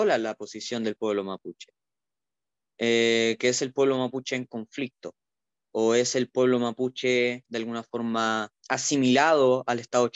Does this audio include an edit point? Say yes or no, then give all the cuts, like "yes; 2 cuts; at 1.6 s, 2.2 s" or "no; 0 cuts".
yes; 1 cut; at 8.6 s